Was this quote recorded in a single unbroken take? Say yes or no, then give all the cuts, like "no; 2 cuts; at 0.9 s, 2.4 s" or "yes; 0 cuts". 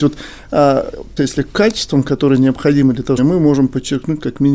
no; 2 cuts; at 1.2 s, 3.2 s